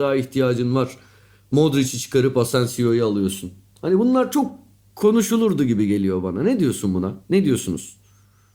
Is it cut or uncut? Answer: uncut